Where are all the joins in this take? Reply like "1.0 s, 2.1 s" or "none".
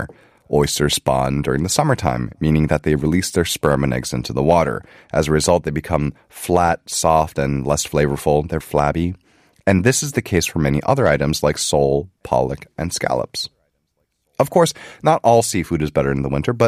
8.6 s